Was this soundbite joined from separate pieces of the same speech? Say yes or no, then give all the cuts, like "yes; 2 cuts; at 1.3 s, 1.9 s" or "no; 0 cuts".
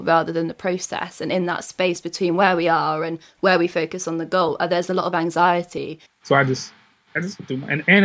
yes; 1 cut; at 6.1 s